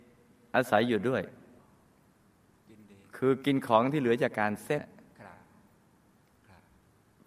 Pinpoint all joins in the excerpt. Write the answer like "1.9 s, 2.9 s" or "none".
4.8 s

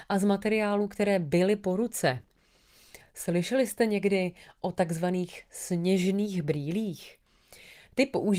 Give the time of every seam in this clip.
none

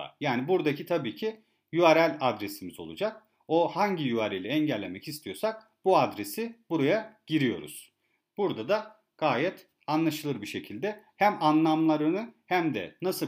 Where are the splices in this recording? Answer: none

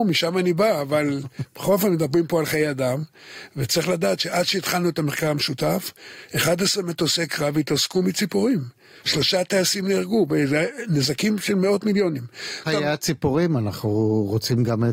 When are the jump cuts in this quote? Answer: 12.7 s

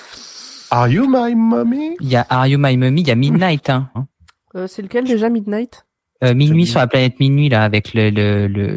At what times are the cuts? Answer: 3.9 s

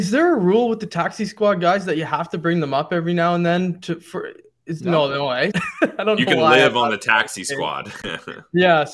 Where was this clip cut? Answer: 5.5 s

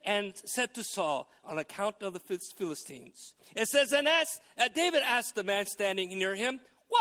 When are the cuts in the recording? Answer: 1.4 s, 3.4 s

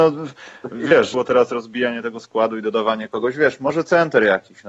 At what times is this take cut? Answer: 1.1 s

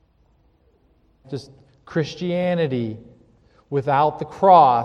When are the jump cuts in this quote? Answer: 1.2 s

